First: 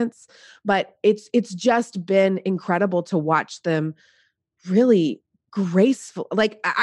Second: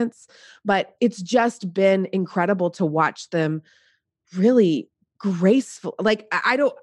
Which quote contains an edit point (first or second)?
second